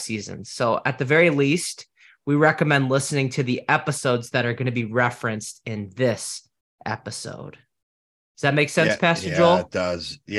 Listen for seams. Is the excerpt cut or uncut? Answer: uncut